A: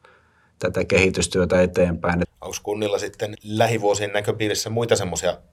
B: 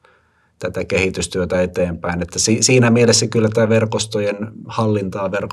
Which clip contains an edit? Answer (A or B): A